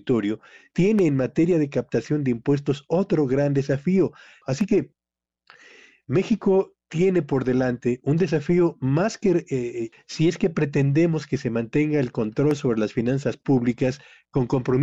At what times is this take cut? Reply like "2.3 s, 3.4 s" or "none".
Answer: 4.4 s, 9.9 s